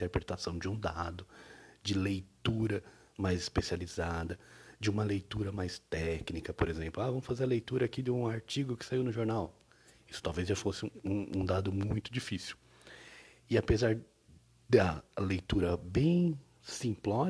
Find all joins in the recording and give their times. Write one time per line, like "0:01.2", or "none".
none